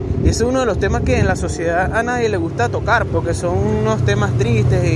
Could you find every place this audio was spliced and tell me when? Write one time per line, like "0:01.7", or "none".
0:03.1